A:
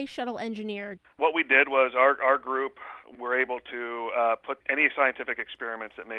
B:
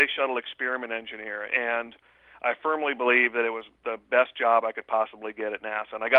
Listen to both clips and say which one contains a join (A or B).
A